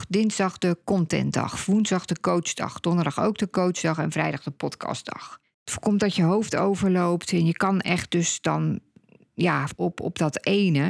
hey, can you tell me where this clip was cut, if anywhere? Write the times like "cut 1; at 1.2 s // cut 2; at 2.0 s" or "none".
cut 1; at 5.4 s // cut 2; at 9.7 s